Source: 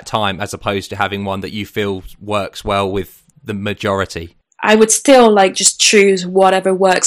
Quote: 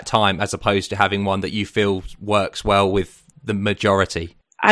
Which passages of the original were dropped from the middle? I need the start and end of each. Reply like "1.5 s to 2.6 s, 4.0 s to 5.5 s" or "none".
none